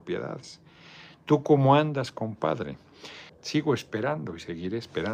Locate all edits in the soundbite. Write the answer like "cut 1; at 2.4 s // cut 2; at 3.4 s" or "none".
cut 1; at 3.3 s